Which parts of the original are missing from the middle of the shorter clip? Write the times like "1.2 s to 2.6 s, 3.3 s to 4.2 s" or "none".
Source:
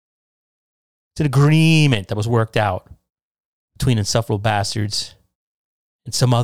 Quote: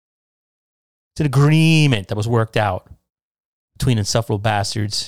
none

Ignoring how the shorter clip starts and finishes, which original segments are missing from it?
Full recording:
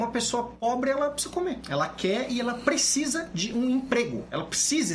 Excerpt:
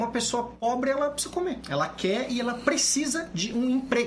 none

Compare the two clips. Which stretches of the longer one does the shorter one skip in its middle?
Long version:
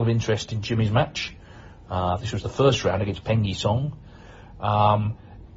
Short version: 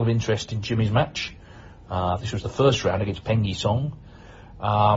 none

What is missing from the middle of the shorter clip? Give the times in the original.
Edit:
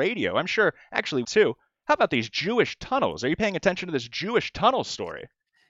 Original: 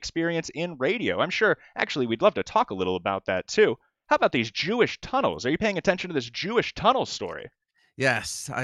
2.1 s to 3.5 s

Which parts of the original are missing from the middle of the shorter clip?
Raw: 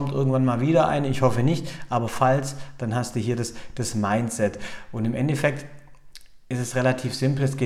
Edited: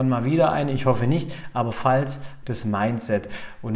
2.8 s to 3.7 s

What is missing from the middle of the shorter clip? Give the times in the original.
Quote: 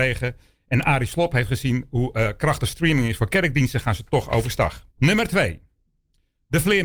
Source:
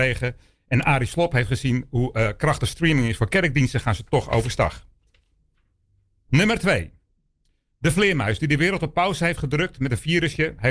4.9 s to 6.2 s

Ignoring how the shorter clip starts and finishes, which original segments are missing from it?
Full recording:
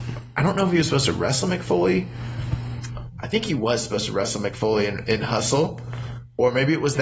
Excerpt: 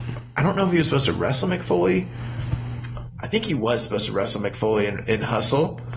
none

